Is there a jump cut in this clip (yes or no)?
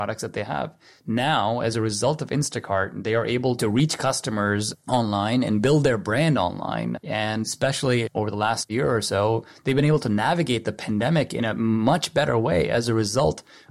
no